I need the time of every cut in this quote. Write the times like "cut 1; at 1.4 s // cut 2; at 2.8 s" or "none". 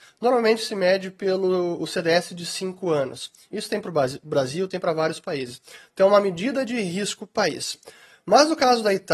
none